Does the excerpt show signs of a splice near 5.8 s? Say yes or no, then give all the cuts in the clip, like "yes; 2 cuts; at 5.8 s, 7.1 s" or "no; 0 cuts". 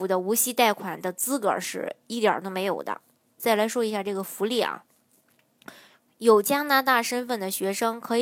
no; 1 cut; at 3.4 s